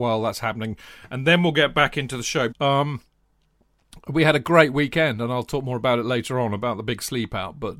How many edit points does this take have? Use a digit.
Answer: 1